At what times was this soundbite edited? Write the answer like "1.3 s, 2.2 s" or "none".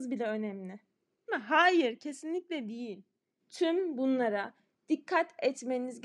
1.3 s, 3.4 s